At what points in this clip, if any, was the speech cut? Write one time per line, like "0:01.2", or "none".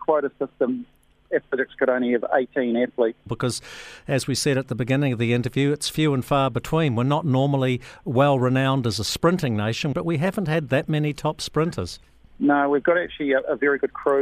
0:03.3
0:09.9